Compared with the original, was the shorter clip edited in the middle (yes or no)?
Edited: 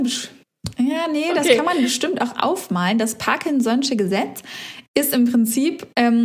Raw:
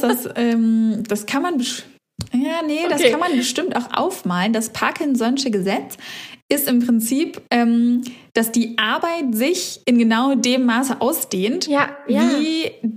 no